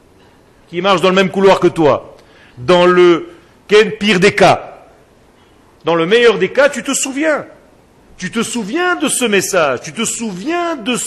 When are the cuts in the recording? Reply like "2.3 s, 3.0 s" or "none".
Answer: none